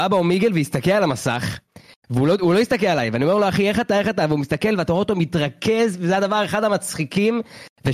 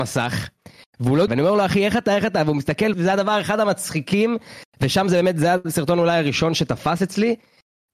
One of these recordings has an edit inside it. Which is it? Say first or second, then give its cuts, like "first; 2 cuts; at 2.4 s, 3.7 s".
second; 2 cuts; at 1.3 s, 2.9 s